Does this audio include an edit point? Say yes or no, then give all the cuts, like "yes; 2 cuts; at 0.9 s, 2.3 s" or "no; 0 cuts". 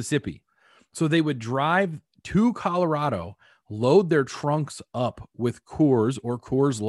no; 0 cuts